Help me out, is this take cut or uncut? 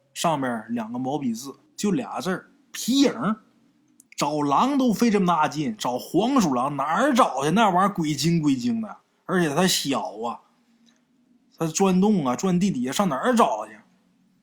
cut